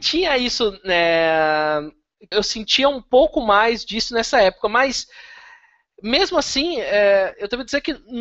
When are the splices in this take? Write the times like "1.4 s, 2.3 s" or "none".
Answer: 2.3 s